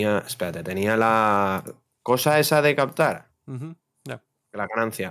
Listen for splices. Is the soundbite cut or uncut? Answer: uncut